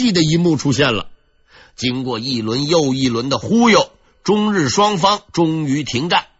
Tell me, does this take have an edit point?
no; 0 cuts

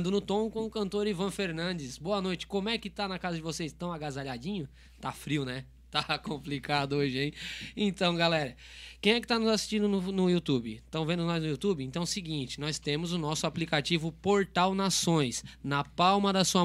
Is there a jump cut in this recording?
no; 0 cuts

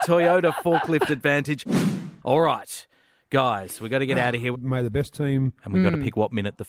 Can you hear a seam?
yes; 2 cuts; at 4.5 s, 5.6 s

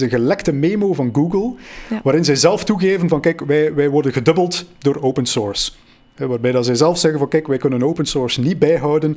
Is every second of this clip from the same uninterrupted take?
yes; 0 cuts

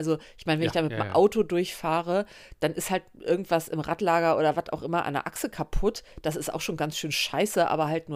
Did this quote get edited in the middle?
no; 0 cuts

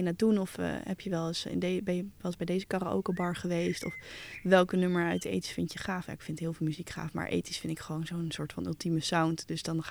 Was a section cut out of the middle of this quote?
no; 0 cuts

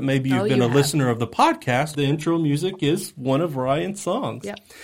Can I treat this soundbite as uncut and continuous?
no; 1 cut; at 1.9 s

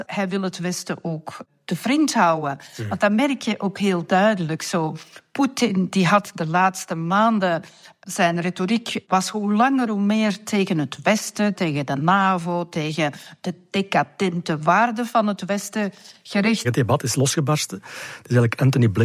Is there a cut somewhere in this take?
yes; 2 cuts; at 11.5 s, 16.6 s

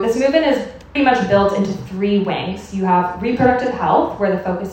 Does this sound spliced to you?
yes; 1 cut; at 1.0 s

